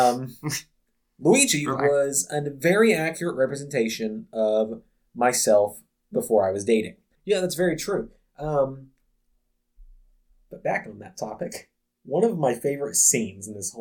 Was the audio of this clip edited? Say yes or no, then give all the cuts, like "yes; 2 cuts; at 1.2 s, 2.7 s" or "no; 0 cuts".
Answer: yes; 1 cut; at 7.2 s